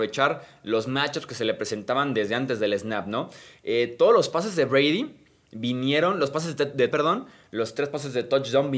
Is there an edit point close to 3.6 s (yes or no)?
no